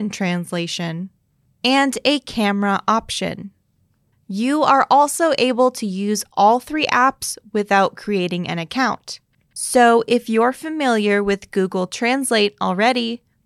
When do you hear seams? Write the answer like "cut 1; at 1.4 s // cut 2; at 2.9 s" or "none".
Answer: cut 1; at 9.6 s